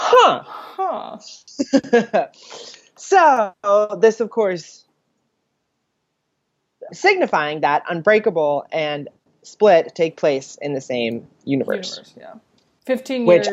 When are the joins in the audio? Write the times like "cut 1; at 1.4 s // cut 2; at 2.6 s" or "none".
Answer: cut 1; at 6.9 s